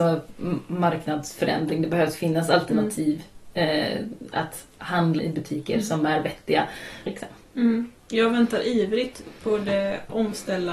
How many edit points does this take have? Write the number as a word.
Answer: two